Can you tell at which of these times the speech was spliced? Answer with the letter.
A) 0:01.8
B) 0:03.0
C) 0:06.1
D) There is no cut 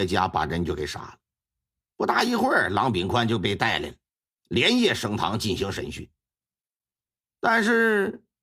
A